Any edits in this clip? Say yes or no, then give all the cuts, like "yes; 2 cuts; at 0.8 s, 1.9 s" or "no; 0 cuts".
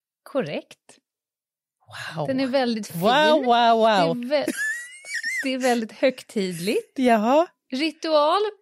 no; 0 cuts